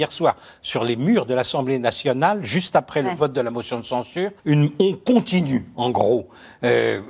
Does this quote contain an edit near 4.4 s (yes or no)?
yes